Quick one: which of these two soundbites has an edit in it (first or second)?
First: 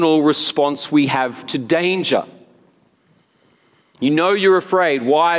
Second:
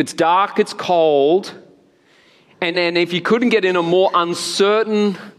second